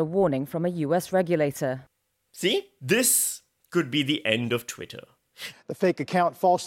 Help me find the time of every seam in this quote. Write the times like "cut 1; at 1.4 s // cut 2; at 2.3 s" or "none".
cut 1; at 2.8 s // cut 2; at 5.5 s

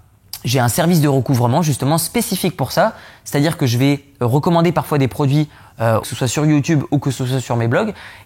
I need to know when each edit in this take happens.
cut 1; at 6.0 s

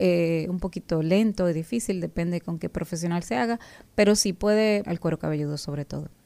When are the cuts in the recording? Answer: cut 1; at 4.8 s

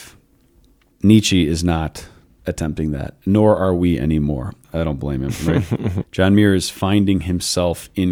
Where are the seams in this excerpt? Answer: cut 1; at 0.9 s // cut 2; at 4.6 s // cut 3; at 6.0 s

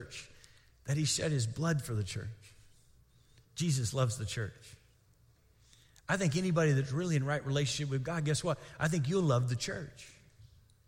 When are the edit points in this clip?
none

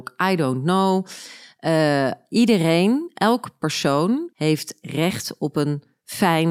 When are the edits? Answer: cut 1; at 4.3 s

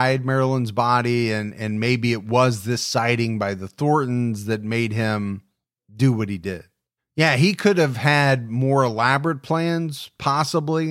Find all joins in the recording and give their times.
cut 1; at 7.0 s

